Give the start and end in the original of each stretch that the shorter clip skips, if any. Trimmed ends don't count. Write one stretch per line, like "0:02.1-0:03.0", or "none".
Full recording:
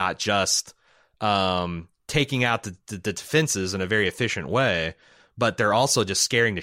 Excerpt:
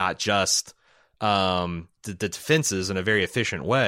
0:02.0-0:02.8